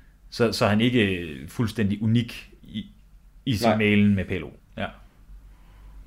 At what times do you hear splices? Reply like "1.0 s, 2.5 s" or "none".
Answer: 4.6 s